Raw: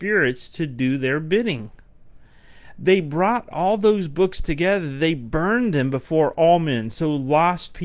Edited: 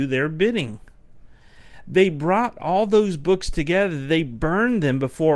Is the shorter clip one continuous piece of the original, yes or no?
yes